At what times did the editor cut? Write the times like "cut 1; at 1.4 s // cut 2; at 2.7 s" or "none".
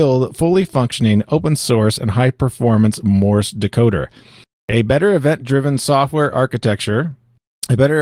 none

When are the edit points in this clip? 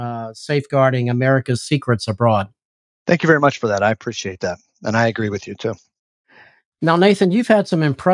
none

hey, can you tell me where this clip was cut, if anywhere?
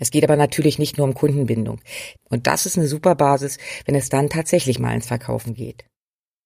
cut 1; at 2.2 s

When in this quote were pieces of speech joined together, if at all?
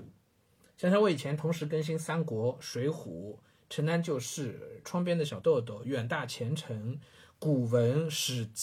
none

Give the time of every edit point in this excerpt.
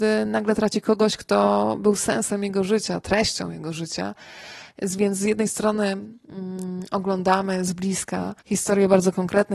cut 1; at 8.4 s

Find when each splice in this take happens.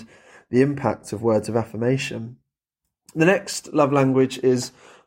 none

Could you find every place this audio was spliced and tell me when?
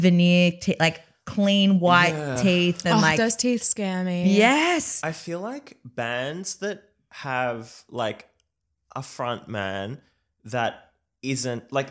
none

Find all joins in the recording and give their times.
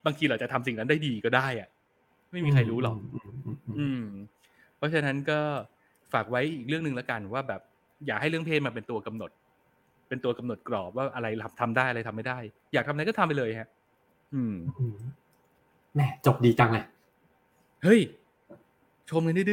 none

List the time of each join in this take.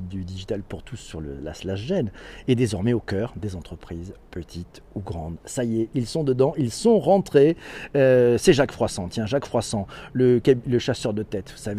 none

